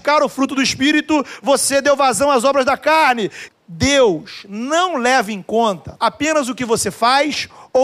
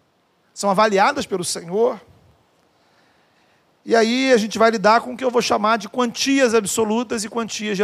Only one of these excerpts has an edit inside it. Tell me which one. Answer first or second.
first